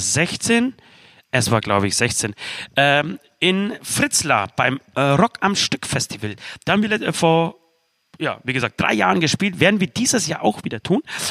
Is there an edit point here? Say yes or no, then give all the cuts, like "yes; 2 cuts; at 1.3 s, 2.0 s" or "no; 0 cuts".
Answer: no; 0 cuts